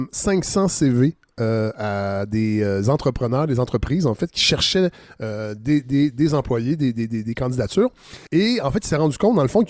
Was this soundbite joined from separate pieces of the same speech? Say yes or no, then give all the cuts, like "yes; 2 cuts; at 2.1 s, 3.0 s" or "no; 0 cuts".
yes; 1 cut; at 8.3 s